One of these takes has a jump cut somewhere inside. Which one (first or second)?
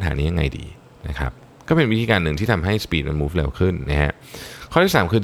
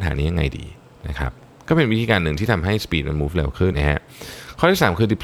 second